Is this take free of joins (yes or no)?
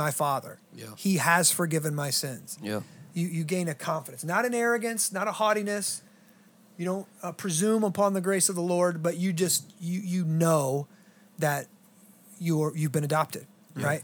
yes